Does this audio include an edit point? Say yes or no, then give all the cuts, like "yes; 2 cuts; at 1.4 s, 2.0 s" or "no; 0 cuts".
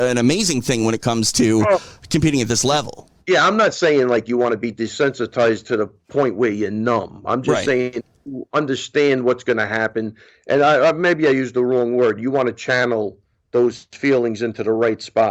yes; 1 cut; at 3.2 s